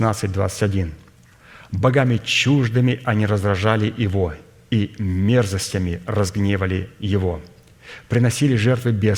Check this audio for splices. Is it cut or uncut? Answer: uncut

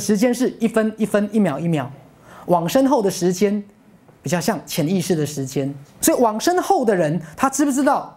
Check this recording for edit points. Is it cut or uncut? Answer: cut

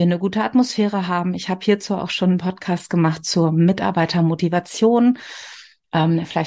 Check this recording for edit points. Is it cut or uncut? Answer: uncut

